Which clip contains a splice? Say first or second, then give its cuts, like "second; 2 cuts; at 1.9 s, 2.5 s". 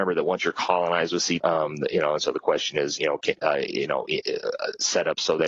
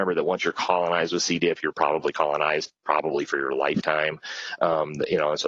first; 2 cuts; at 1.4 s, 3.4 s